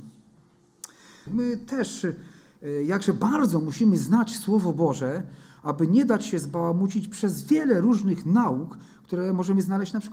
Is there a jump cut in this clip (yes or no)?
yes